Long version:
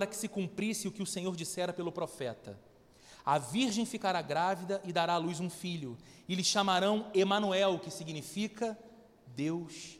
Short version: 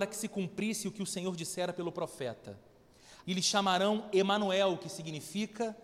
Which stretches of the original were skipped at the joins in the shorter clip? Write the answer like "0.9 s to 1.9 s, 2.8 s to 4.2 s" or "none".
3.2 s to 6.2 s